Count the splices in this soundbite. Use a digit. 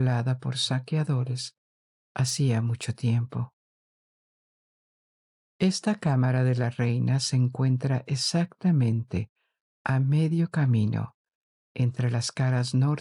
0